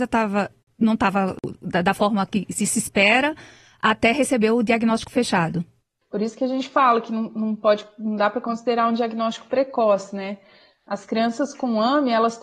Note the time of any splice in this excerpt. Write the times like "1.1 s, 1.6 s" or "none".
6.0 s